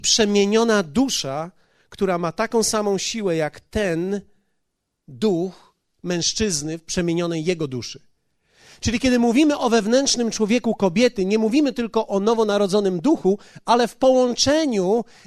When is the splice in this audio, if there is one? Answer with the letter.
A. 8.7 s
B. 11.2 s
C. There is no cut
C